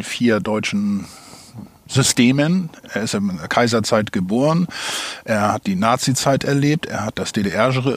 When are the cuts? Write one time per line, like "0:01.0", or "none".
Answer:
none